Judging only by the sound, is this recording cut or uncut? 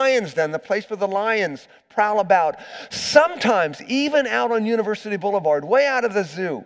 uncut